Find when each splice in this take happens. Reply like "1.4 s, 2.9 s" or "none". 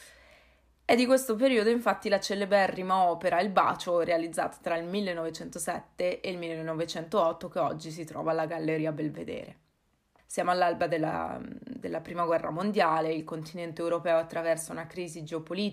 10.2 s